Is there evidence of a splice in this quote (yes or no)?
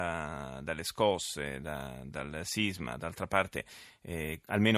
no